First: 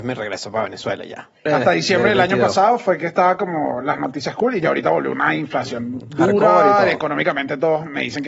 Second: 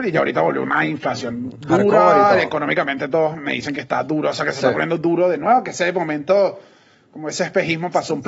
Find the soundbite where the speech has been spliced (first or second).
first